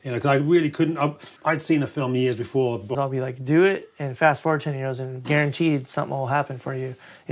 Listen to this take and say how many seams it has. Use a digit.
2